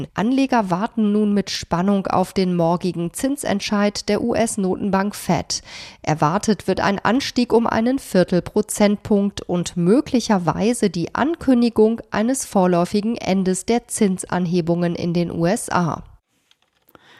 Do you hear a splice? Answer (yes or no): no